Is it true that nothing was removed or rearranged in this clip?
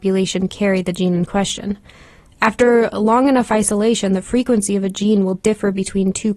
yes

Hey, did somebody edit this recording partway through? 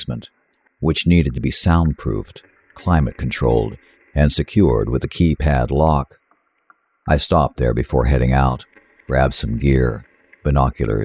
no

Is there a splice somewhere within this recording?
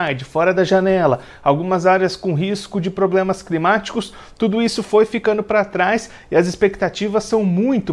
no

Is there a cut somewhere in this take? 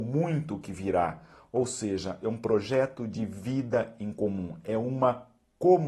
no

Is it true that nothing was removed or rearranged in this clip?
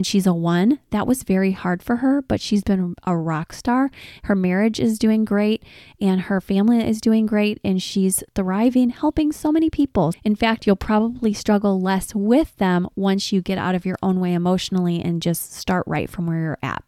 no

